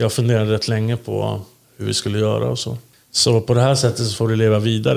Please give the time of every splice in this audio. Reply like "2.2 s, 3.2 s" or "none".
2.9 s